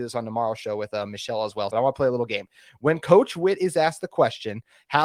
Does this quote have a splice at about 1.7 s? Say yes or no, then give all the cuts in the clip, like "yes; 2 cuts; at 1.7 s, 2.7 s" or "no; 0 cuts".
yes; 1 cut; at 1.7 s